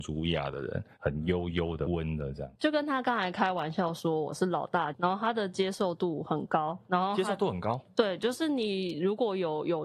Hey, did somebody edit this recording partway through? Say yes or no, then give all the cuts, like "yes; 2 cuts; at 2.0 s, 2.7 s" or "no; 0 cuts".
yes; 2 cuts; at 1.9 s, 4.9 s